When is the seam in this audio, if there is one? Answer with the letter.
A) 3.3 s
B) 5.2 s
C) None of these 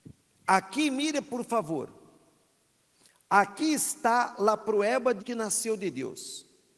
B